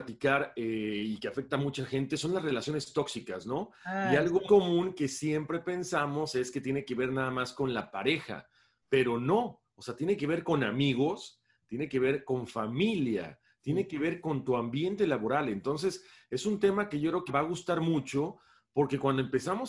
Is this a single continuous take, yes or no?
no